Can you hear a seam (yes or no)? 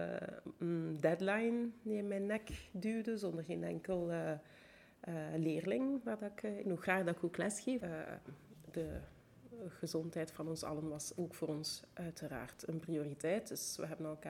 yes